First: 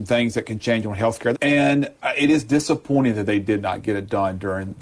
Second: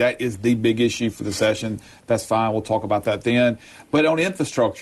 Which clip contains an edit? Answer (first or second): first